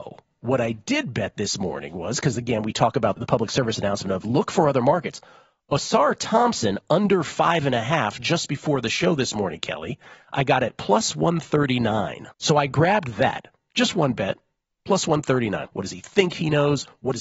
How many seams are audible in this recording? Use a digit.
3